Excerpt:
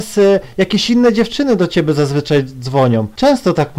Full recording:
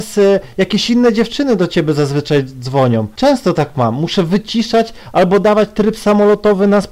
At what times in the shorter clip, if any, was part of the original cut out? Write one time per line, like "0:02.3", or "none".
none